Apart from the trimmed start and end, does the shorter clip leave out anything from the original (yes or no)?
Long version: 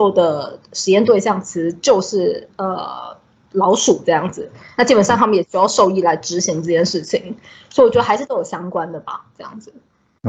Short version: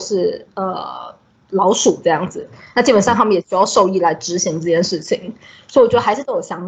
no